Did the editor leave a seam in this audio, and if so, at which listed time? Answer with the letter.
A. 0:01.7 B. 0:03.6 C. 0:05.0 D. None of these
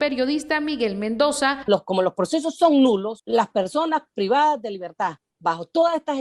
A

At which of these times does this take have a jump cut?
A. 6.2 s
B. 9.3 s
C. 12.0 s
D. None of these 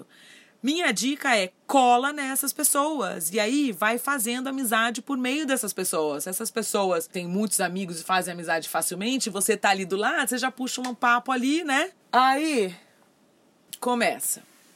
C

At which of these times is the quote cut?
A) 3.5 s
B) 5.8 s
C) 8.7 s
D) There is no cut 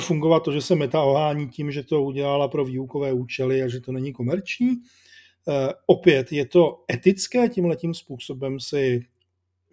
D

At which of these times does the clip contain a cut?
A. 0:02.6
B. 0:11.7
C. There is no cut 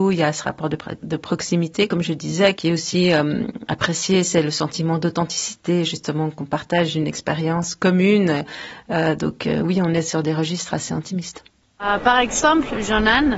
A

